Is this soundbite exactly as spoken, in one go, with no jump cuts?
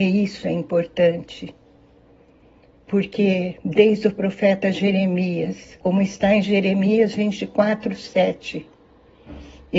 no; 1 cut; at 5.8 s

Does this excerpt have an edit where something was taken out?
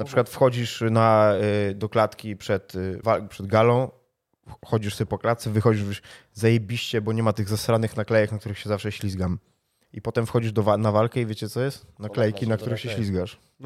yes; 1 cut; at 3.0 s

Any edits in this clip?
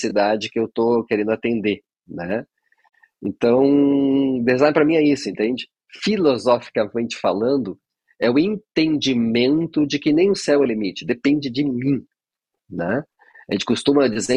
no; 0 cuts

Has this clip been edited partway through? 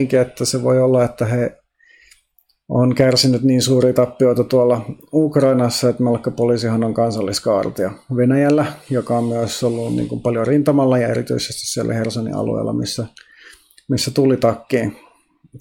no; 0 cuts

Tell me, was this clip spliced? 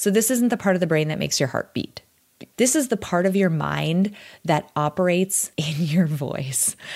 yes; 2 cuts; at 2.5 s, 5.5 s

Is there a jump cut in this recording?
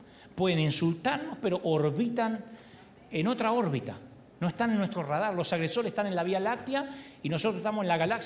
no; 0 cuts

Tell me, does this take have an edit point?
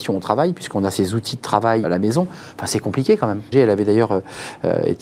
yes; 2 cuts; at 1.8 s, 3.5 s

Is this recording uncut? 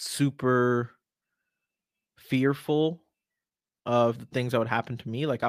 yes; 0 cuts

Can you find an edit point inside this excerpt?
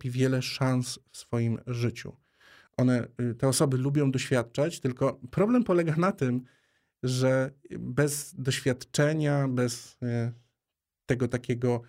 yes; 1 cut; at 2.7 s

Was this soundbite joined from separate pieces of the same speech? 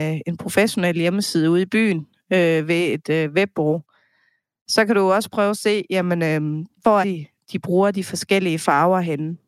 yes; 1 cut; at 7.0 s

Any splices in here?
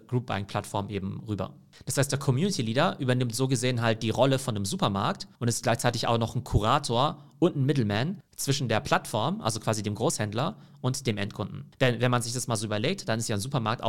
yes; 1 cut; at 5.3 s

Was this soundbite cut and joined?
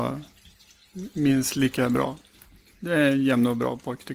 no; 0 cuts

